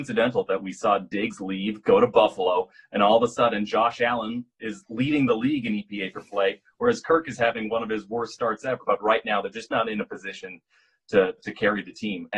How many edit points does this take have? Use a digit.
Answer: 2